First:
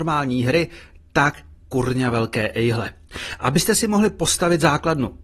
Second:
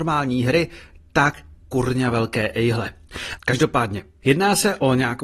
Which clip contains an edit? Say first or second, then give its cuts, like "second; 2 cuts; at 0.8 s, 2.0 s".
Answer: second; 1 cut; at 3.4 s